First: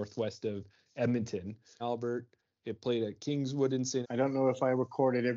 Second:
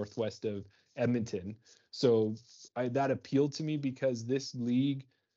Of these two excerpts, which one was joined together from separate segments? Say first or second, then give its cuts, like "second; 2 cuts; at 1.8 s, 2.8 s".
first; 2 cuts; at 1.8 s, 4.0 s